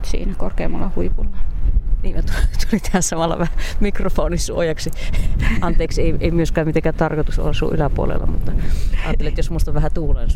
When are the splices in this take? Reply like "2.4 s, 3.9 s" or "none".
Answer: none